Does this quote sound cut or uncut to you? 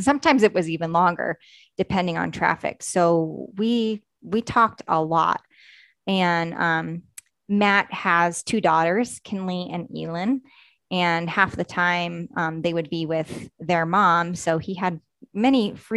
uncut